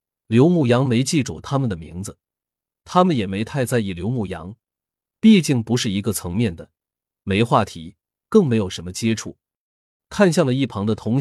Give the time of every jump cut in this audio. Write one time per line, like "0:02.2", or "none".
0:10.0